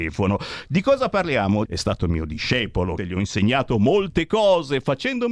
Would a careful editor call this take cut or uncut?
cut